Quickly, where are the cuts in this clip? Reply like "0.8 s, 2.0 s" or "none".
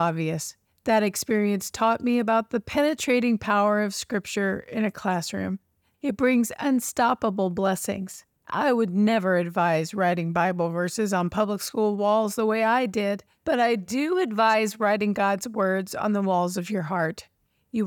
5.9 s, 8.3 s